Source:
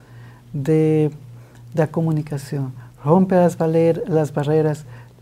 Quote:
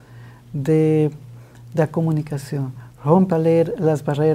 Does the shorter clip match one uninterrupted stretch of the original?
no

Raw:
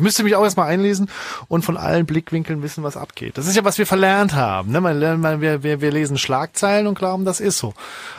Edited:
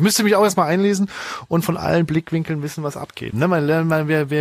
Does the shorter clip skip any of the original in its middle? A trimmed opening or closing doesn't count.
yes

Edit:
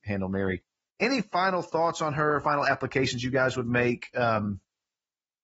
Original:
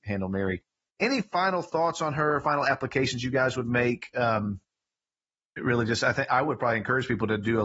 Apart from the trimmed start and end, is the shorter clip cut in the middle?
no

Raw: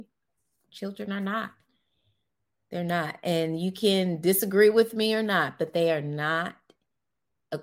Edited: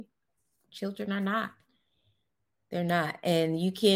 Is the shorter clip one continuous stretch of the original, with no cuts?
yes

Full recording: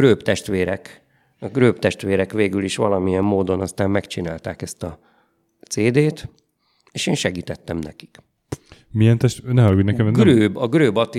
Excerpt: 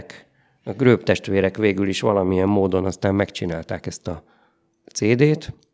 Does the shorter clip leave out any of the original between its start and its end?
no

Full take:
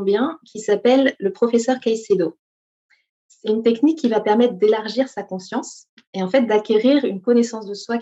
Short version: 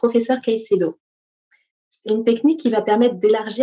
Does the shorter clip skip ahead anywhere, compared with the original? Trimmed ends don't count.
no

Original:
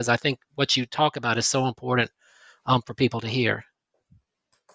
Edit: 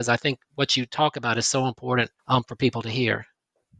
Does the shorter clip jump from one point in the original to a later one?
yes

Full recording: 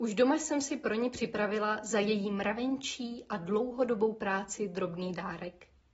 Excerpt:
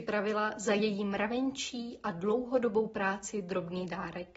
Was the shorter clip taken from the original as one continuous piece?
yes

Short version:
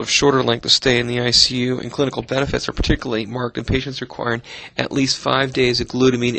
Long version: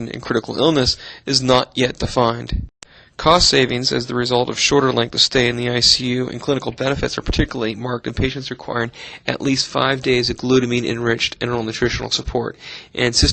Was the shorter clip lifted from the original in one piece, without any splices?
yes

